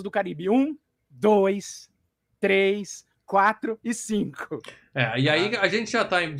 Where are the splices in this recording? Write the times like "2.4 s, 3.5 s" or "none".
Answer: none